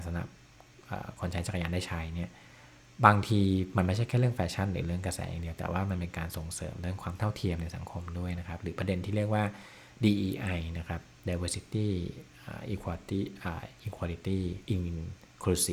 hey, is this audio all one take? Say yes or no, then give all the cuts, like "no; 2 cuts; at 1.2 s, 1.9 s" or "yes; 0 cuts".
no; 1 cut; at 14.7 s